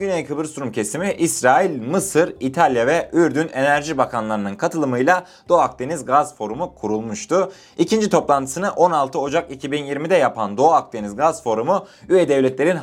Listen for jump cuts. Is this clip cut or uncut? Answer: uncut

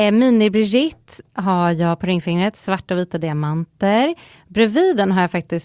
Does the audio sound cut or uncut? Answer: uncut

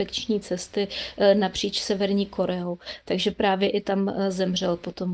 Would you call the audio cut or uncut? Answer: uncut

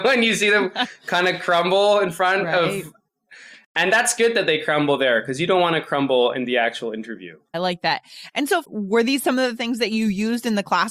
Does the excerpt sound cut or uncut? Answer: cut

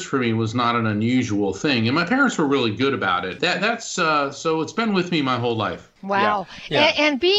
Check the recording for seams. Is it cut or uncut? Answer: cut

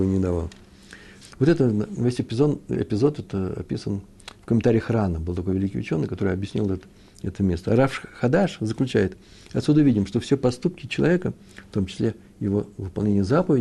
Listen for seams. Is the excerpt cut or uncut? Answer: cut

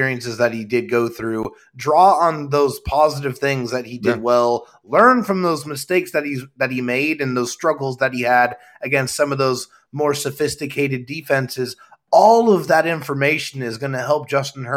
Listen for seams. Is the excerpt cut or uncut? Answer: uncut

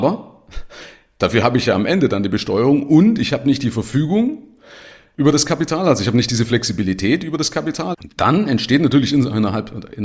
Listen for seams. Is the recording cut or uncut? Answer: cut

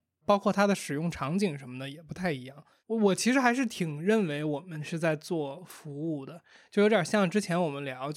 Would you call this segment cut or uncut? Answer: uncut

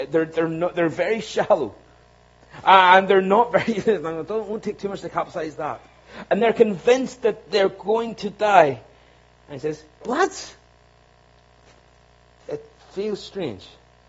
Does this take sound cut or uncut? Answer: cut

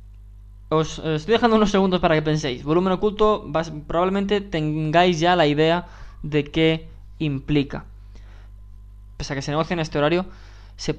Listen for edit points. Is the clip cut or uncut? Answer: cut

